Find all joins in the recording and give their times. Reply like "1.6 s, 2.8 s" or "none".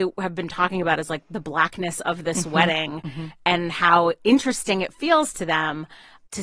none